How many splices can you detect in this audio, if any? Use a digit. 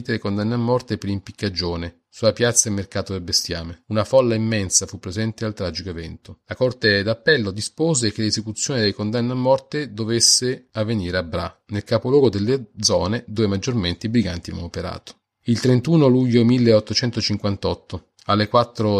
2